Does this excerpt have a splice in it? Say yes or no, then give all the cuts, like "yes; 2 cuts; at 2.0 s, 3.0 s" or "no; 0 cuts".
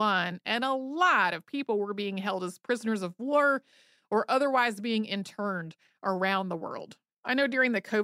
yes; 1 cut; at 7.1 s